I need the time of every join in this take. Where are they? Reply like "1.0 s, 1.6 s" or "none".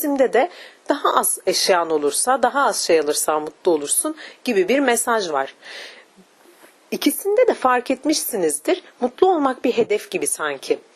none